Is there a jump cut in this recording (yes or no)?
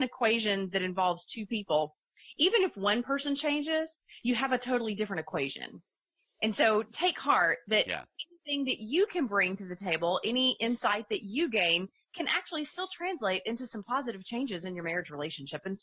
no